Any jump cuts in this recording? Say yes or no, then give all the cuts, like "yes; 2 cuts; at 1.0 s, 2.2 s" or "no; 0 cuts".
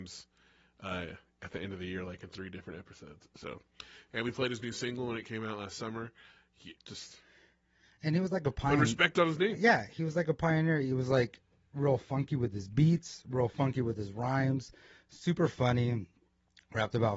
yes; 1 cut; at 6.8 s